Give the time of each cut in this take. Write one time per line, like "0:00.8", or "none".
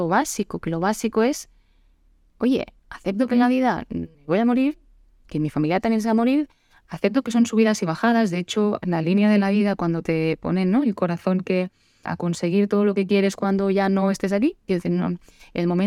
0:04.1
0:12.0